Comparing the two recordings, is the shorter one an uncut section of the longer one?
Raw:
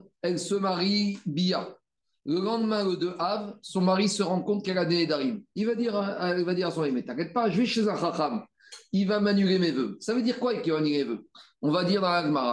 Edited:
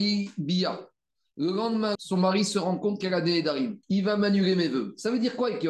no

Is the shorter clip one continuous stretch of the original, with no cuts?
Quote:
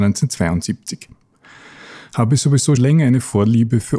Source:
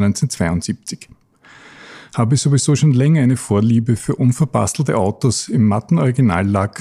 no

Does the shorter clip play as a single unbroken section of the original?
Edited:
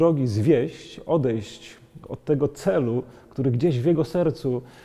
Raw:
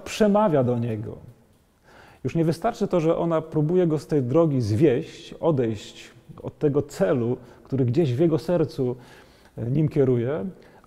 yes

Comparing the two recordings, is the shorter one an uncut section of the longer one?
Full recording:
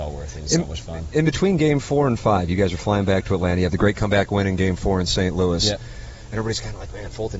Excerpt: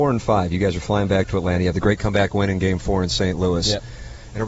yes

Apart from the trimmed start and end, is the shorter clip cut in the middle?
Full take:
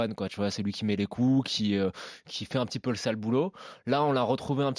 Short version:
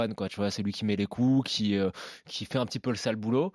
no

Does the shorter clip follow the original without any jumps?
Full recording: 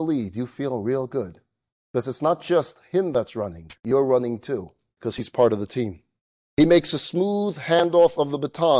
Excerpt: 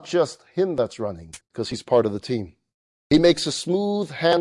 no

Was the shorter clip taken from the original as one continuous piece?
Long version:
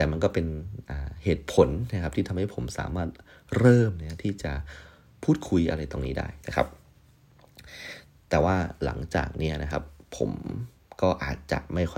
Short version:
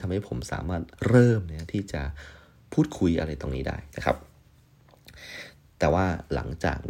no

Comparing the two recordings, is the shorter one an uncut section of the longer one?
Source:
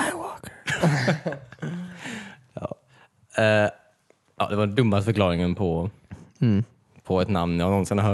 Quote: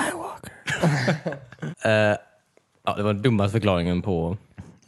no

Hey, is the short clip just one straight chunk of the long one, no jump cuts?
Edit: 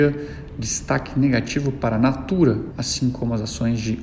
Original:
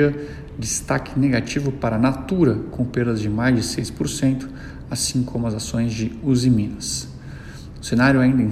no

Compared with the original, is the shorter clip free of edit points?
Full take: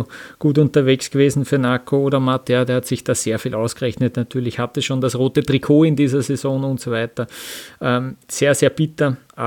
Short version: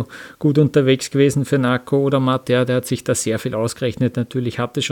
yes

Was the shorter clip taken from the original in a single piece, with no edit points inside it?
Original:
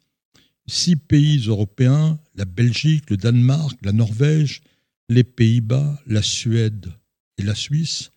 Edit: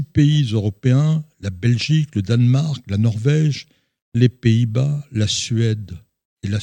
yes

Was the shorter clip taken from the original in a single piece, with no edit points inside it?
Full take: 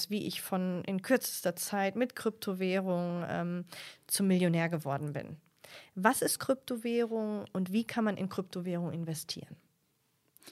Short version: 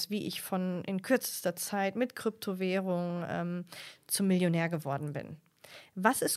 yes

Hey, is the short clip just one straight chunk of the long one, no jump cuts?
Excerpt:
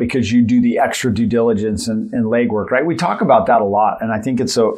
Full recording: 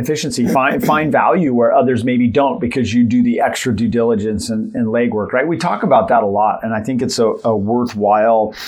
yes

